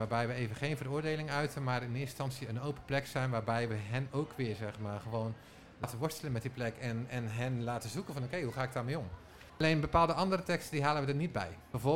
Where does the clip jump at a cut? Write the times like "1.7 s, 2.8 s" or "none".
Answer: 9.5 s

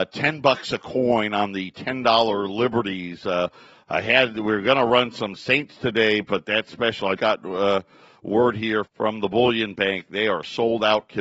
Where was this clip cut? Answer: 7.2 s, 8.9 s

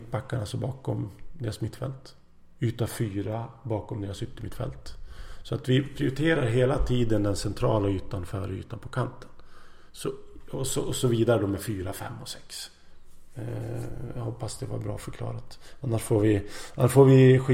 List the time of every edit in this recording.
none

